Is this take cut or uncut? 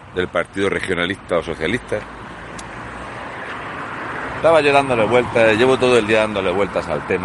cut